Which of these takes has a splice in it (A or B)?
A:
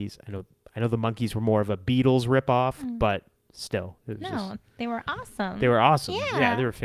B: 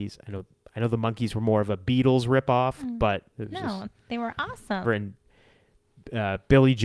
B